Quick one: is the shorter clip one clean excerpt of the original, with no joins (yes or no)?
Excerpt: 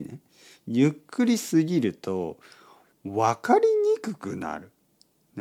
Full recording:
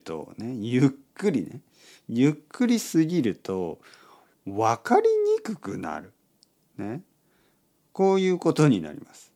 yes